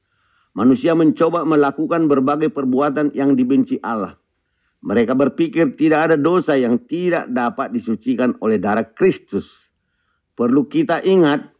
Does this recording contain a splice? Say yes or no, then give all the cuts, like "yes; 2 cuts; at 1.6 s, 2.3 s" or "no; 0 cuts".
no; 0 cuts